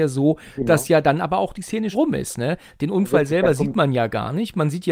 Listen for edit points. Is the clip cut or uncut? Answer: cut